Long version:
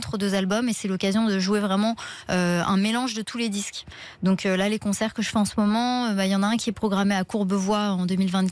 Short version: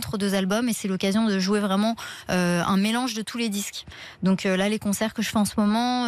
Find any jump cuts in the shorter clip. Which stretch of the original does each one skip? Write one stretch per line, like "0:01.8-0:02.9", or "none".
none